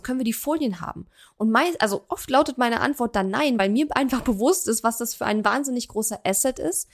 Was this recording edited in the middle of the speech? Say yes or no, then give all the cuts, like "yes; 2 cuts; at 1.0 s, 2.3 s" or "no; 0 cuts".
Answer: no; 0 cuts